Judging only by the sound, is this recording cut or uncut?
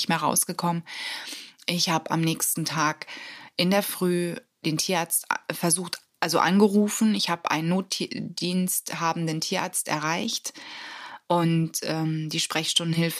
uncut